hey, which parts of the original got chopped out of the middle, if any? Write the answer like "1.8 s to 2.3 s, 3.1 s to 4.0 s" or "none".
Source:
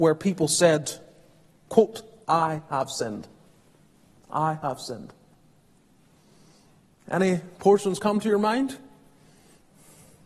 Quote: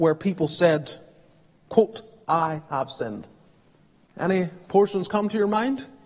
4.1 s to 7.0 s